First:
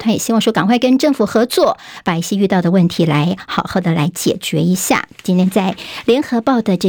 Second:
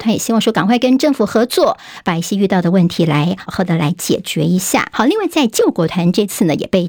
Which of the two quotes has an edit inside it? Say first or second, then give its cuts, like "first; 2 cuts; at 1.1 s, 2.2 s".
second; 2 cuts; at 3.5 s, 4.9 s